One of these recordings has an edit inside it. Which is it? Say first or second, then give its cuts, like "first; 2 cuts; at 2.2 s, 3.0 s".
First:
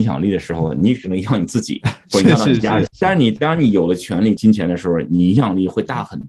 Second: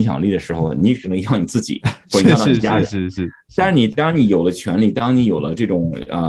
first; 2 cuts; at 2.9 s, 4.4 s